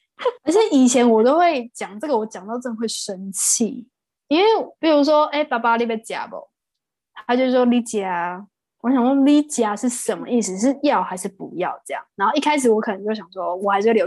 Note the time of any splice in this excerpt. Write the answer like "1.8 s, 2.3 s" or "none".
none